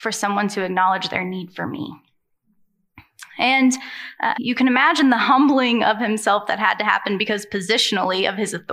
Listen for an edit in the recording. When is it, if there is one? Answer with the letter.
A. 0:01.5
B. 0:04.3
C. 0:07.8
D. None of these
B